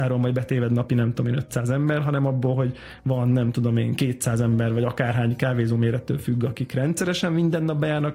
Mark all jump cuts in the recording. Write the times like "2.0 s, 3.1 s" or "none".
none